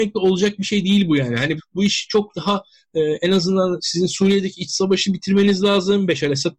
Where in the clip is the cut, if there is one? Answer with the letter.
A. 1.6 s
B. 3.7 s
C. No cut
A